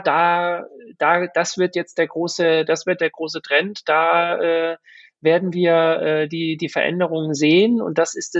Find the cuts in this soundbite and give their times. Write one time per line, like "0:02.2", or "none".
none